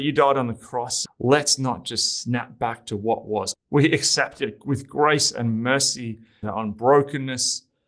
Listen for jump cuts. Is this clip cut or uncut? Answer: cut